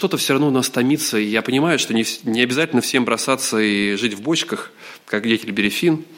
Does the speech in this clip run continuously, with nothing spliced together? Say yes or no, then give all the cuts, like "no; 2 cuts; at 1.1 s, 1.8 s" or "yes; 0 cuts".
yes; 0 cuts